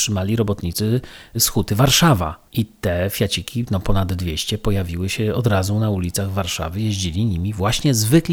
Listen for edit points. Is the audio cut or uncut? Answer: cut